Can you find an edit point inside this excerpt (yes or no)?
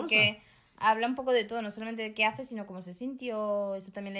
no